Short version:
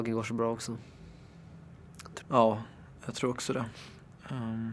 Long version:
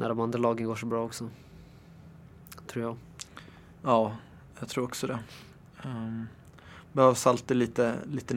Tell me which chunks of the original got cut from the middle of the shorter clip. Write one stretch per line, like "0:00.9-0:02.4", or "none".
0:02.7-0:03.7